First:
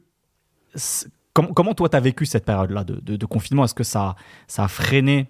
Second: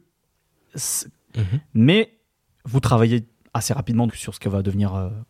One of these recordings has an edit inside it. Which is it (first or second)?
second